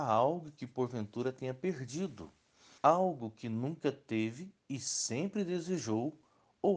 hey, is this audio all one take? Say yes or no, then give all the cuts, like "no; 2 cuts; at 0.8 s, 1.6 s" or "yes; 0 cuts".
no; 1 cut; at 2.8 s